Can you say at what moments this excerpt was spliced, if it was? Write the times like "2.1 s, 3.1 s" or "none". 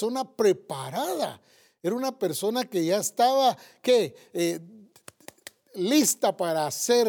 none